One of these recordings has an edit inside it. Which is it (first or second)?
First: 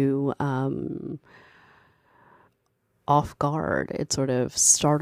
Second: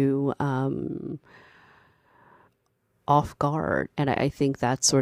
second